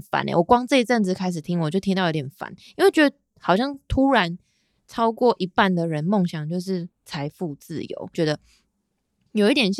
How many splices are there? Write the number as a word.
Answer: one